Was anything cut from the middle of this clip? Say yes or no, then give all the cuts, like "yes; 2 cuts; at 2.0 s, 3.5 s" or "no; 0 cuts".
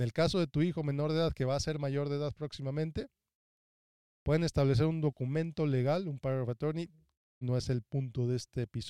yes; 1 cut; at 7.4 s